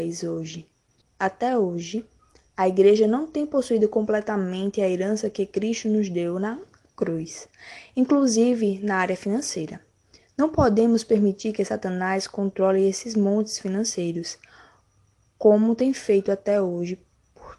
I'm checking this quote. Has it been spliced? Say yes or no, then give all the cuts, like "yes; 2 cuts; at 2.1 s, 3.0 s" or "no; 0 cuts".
yes; 1 cut; at 1.0 s